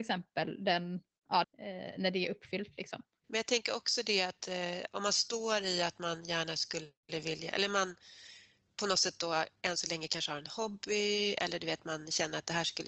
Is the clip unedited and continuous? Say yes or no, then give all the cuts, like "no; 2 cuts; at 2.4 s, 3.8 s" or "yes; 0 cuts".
no; 1 cut; at 1.4 s